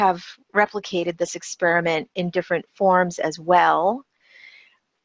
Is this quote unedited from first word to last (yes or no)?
yes